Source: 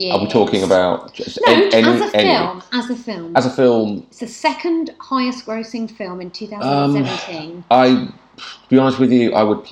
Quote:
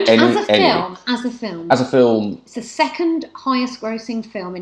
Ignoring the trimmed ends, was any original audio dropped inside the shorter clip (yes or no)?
no